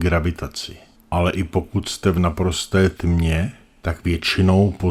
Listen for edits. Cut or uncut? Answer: cut